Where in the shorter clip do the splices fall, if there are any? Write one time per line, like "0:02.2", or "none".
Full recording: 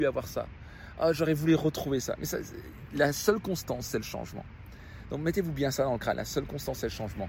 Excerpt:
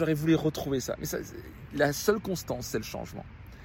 none